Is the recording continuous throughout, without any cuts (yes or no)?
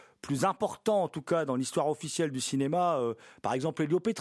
yes